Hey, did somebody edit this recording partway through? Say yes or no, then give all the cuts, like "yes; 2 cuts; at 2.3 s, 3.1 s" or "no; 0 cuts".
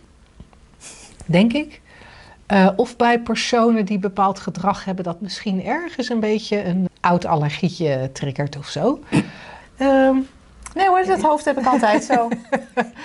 yes; 2 cuts; at 6.9 s, 9.6 s